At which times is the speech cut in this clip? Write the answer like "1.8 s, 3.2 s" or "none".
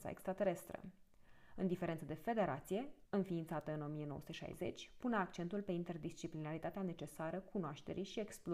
3.1 s